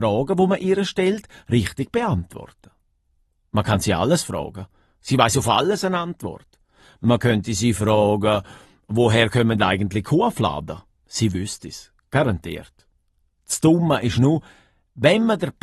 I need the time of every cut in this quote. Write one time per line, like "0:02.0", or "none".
none